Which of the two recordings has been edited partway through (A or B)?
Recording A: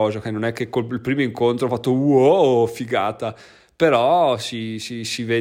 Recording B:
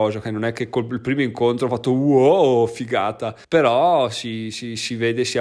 B